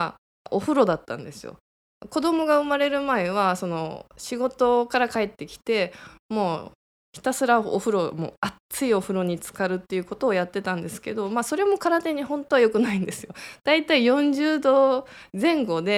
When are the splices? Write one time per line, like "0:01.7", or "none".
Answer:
none